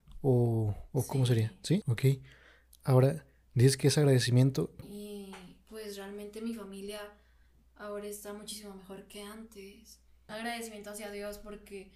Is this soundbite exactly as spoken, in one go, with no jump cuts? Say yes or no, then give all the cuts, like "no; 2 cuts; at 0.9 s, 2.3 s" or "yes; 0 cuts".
no; 3 cuts; at 1.8 s, 4.8 s, 10.3 s